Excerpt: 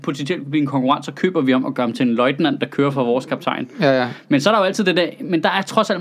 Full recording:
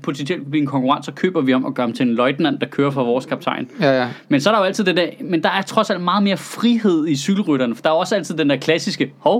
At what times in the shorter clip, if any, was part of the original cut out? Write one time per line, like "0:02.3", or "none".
none